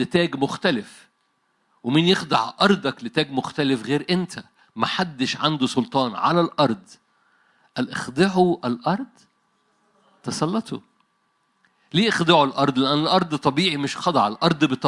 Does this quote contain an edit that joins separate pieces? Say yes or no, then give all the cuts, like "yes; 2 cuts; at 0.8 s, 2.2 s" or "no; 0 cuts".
no; 0 cuts